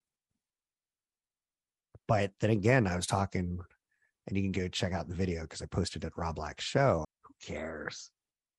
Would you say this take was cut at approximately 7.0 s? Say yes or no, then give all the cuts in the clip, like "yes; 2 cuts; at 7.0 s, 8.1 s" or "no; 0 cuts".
yes; 1 cut; at 7.0 s